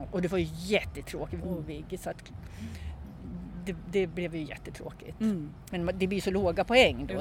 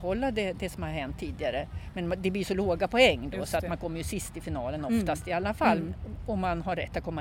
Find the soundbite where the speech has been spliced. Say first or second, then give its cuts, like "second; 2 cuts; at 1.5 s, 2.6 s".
first; 2 cuts; at 1.4 s, 5.7 s